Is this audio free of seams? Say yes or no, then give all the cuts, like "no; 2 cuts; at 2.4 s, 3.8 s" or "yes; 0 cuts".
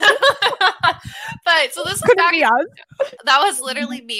no; 1 cut; at 3.2 s